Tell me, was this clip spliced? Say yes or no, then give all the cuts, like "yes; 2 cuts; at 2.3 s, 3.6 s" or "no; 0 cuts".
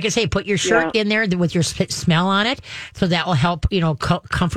no; 0 cuts